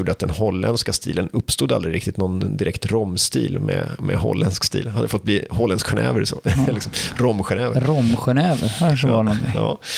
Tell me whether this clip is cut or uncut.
uncut